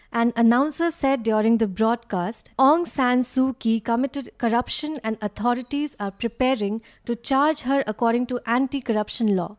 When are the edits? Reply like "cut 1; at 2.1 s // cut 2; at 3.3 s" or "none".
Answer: cut 1; at 2.5 s